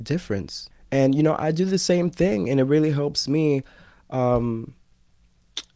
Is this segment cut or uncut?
uncut